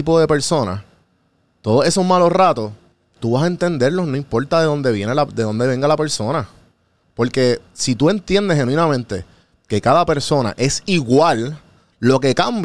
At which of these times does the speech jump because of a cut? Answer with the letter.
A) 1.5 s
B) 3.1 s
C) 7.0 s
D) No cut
C